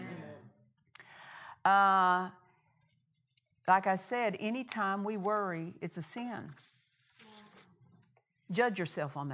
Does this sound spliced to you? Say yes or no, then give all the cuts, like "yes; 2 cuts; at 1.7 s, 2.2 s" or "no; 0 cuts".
no; 0 cuts